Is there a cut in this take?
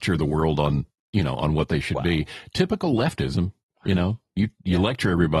no; 0 cuts

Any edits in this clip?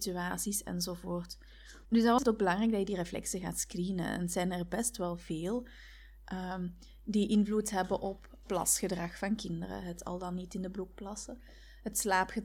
yes; 2 cuts; at 1.8 s, 8.4 s

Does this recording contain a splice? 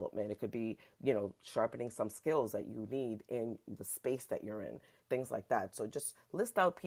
no; 0 cuts

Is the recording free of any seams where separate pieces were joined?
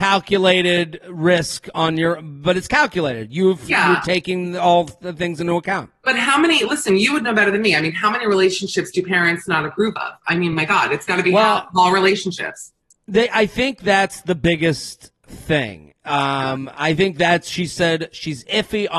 yes; 0 cuts

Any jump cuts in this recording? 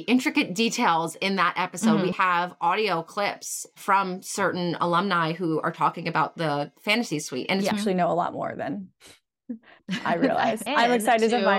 yes; 3 cuts; at 2.1 s, 7.7 s, 10.7 s

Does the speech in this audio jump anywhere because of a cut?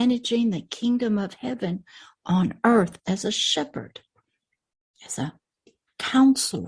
no; 0 cuts

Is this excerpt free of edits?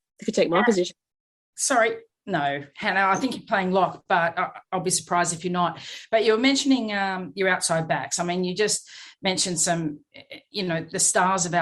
yes; 0 cuts

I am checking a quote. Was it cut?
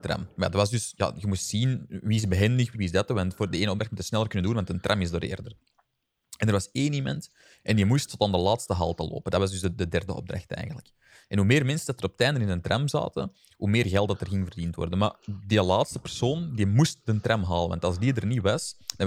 yes; 1 cut; at 2.7 s

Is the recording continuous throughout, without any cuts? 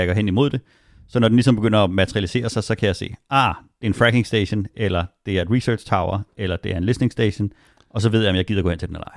yes; 0 cuts

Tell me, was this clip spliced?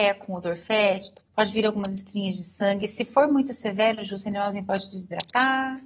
yes; 1 cut; at 1.2 s

